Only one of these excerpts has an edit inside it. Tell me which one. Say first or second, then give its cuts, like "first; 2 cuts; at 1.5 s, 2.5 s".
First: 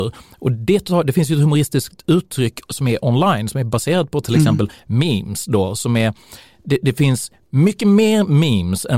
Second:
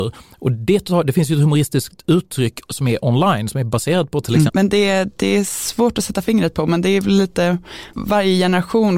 second; 1 cut; at 4.5 s